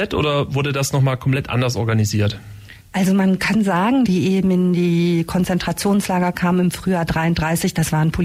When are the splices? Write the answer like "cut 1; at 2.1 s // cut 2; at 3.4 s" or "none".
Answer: cut 1; at 2.8 s // cut 2; at 4.1 s